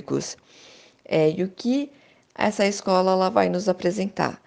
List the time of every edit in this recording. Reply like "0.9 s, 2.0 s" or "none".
none